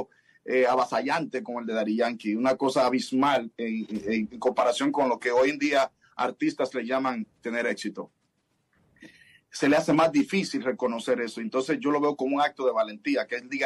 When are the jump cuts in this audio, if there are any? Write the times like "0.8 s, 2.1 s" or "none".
none